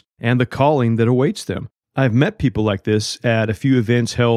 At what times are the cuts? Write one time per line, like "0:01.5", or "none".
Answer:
none